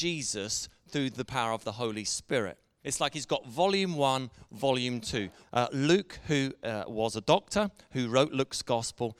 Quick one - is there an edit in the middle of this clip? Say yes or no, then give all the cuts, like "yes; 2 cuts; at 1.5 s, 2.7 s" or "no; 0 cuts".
yes; 2 cuts; at 2.8 s, 5.4 s